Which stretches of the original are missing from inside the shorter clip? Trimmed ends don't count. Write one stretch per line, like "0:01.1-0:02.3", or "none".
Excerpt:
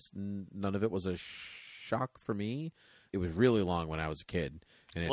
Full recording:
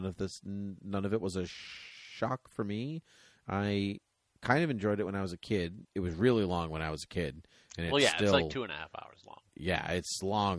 0:03.4-0:05.9